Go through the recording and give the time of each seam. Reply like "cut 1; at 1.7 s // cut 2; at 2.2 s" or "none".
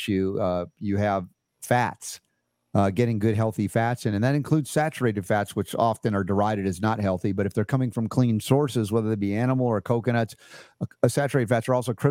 none

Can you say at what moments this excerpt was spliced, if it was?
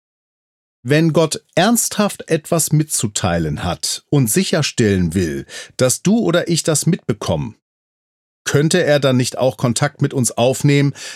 none

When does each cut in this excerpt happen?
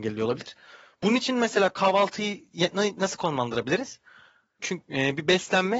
cut 1; at 4.6 s

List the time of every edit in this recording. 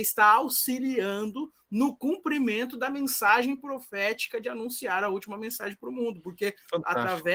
none

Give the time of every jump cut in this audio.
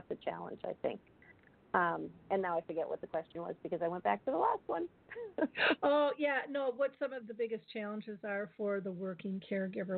cut 1; at 7.2 s

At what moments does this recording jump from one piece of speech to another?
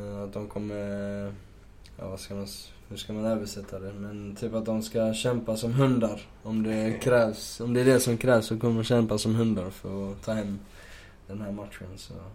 none

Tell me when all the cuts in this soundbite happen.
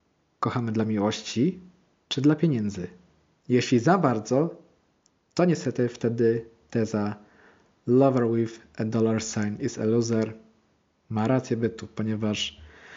cut 1; at 3.4 s

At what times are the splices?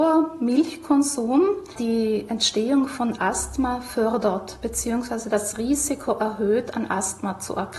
none

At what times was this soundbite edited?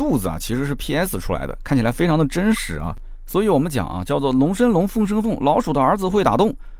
none

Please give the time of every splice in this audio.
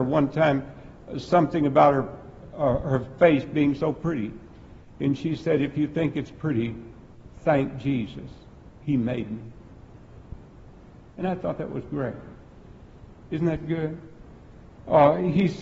none

